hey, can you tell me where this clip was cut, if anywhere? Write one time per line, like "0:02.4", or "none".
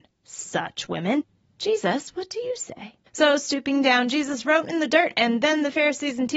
0:03.1